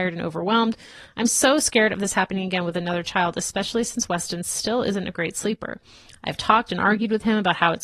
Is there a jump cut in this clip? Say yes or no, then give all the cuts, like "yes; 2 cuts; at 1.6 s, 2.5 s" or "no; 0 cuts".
no; 0 cuts